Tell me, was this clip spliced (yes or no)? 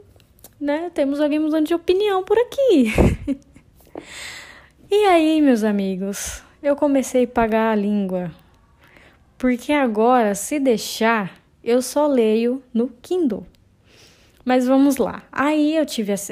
no